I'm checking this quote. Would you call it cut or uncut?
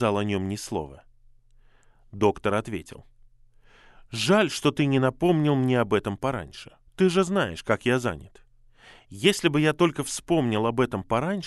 cut